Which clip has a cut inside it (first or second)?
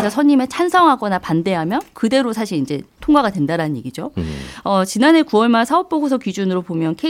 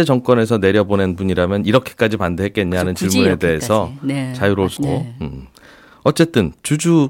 second